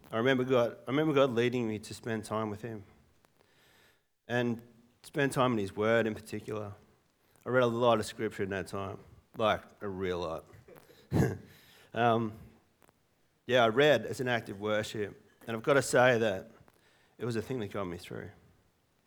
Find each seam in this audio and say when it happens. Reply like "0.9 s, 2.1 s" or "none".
none